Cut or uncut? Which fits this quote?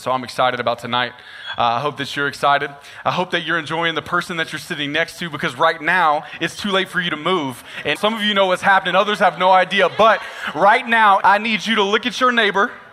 cut